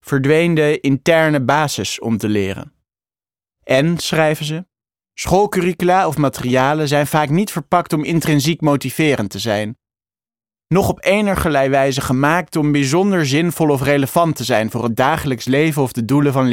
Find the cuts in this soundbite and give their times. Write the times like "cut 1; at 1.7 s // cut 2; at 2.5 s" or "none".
none